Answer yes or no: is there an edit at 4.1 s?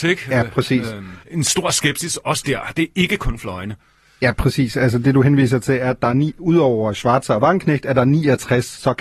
no